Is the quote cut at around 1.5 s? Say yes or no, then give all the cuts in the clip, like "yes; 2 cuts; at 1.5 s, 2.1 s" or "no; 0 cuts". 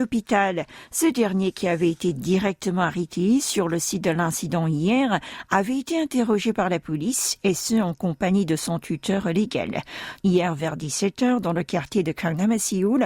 no; 1 cut; at 10.2 s